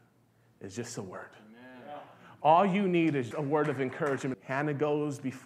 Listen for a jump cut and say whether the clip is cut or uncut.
cut